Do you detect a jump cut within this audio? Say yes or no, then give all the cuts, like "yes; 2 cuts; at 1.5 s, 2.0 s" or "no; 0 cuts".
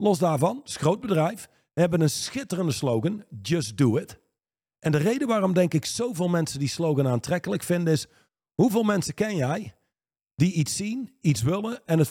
no; 0 cuts